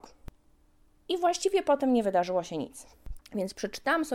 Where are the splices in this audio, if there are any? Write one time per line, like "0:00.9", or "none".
0:03.2